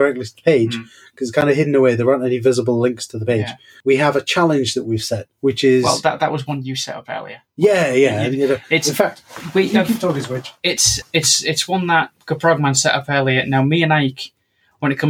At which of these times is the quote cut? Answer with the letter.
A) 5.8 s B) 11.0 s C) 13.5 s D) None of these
B